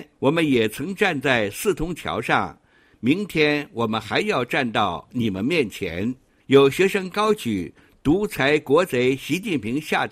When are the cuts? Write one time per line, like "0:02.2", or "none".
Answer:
0:02.9
0:06.4

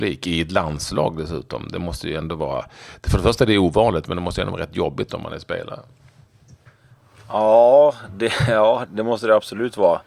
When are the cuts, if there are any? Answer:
0:08.9

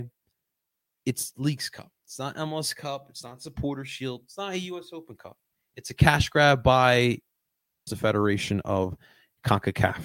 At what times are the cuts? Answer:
0:07.9

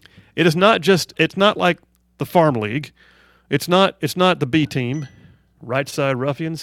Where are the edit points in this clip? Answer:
0:01.1
0:05.6

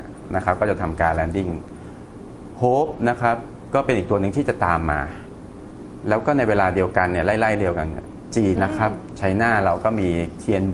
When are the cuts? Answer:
0:08.6

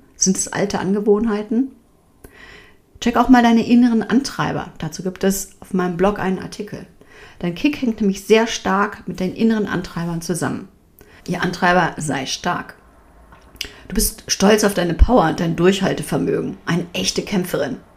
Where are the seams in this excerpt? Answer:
0:11.2

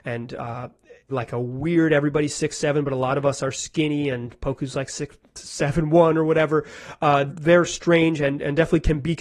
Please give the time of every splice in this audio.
0:01.1
0:07.3

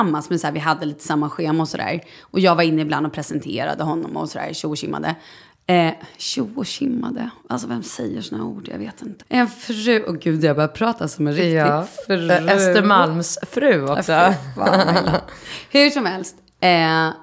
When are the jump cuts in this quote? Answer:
0:09.2

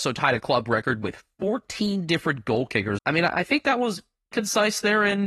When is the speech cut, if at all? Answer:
0:03.0
0:04.3

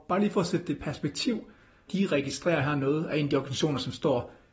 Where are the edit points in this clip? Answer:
0:01.9

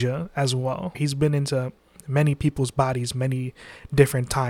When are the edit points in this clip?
0:00.9

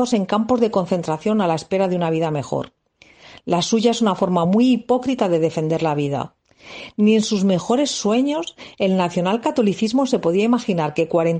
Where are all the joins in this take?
none

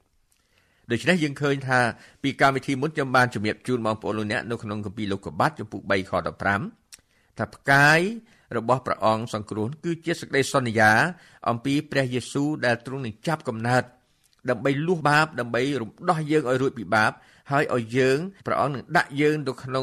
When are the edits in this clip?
0:15.0
0:18.4

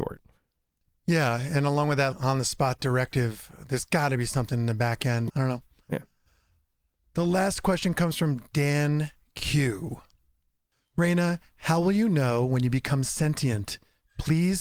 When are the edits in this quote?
0:02.1
0:05.3

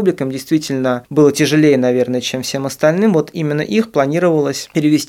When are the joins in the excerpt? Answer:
none

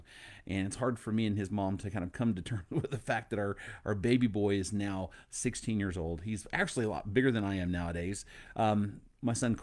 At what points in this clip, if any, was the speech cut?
0:08.5

